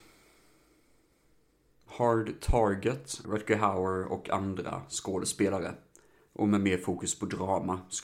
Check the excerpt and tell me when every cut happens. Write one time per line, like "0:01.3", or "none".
0:03.2